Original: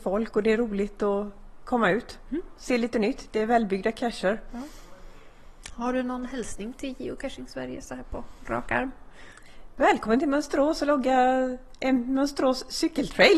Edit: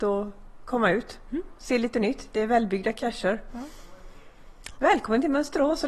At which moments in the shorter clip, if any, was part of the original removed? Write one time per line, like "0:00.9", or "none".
0:04.8